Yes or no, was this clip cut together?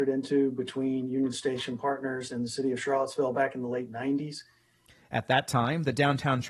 no